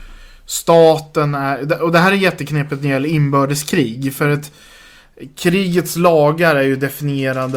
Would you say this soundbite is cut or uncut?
uncut